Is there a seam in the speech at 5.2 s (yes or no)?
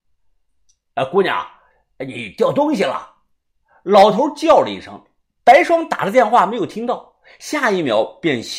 no